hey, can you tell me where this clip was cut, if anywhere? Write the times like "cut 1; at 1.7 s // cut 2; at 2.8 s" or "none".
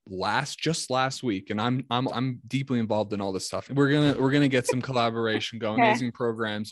cut 1; at 2.1 s // cut 2; at 3.7 s // cut 3; at 5.8 s